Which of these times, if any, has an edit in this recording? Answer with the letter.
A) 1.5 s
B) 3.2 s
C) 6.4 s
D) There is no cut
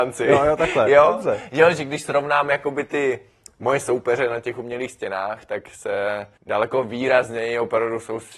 C